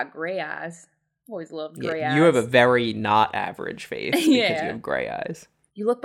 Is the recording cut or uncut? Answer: uncut